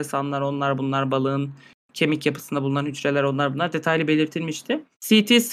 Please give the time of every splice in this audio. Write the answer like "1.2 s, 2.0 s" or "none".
none

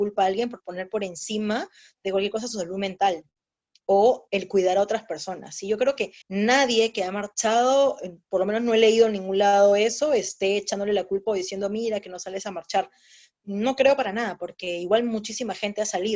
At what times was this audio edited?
6.2 s

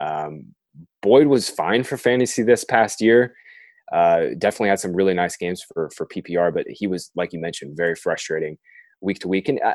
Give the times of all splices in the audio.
none

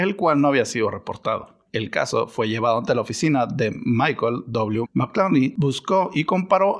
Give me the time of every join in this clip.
1.7 s, 4.8 s

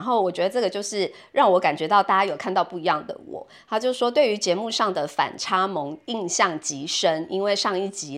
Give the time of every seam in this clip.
none

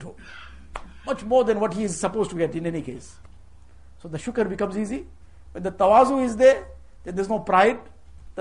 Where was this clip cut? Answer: none

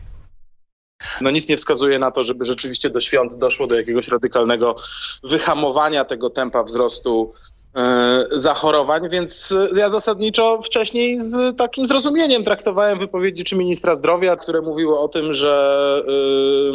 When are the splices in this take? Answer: 1.2 s, 14.4 s

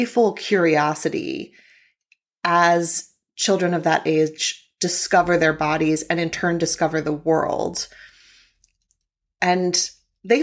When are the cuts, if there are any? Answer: none

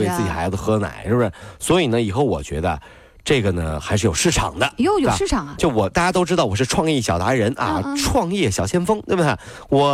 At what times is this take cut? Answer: none

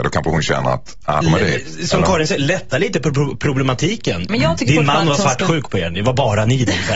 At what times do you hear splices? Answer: 1.2 s, 4.3 s

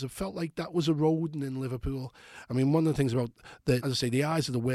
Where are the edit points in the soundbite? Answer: 2.5 s, 3.8 s

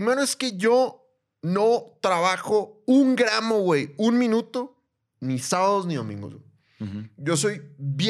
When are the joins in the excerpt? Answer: none

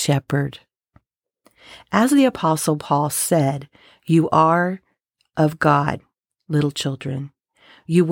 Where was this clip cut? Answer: none

